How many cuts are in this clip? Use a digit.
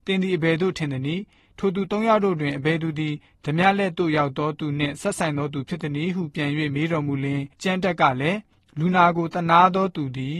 1